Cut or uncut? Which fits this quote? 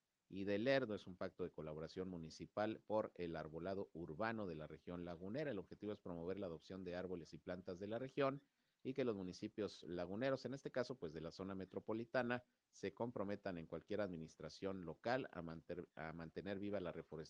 uncut